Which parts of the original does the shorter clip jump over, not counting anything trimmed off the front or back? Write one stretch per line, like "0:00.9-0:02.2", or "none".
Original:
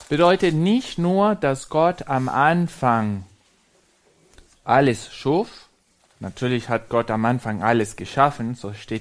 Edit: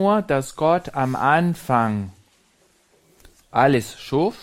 none